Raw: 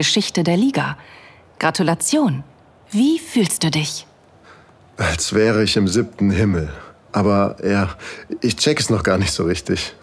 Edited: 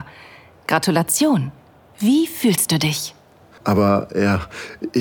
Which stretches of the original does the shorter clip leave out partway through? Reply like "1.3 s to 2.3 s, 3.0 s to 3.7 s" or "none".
4.5 s to 7.1 s